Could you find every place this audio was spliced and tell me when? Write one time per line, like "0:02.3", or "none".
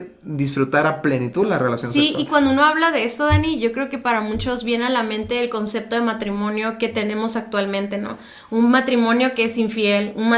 none